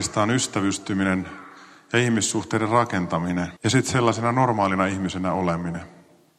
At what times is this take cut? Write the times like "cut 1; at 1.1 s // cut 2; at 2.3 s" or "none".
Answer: cut 1; at 3.6 s